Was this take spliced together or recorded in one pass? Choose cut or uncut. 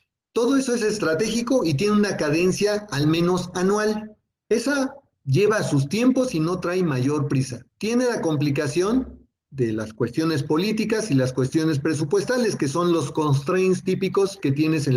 cut